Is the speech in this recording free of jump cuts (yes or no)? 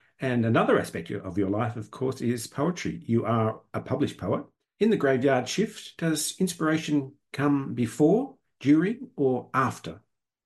yes